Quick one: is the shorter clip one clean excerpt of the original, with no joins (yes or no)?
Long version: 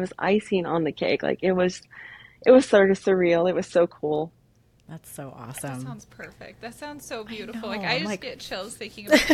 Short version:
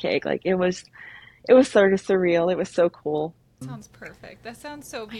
no